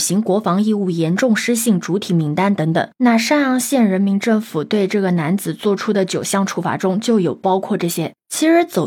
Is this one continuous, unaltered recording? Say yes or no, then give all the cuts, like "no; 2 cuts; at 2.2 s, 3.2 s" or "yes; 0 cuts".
yes; 0 cuts